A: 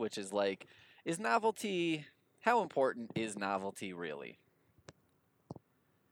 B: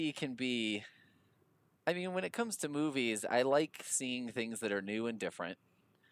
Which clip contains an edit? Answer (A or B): B